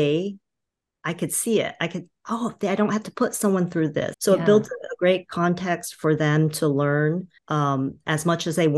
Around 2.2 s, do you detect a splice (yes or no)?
no